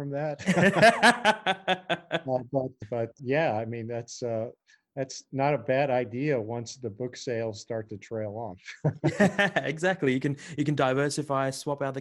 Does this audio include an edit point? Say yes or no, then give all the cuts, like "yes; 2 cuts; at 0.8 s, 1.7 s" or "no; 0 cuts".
no; 0 cuts